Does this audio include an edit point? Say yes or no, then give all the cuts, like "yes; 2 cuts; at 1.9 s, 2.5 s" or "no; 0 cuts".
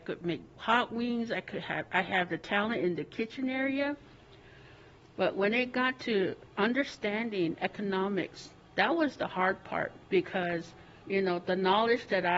no; 0 cuts